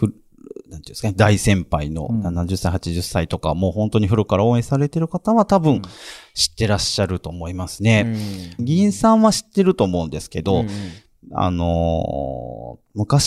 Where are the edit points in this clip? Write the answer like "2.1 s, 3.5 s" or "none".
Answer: 8.6 s